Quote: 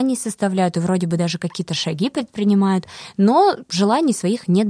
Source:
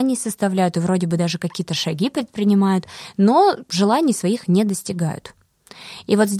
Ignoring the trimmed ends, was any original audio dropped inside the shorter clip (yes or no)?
no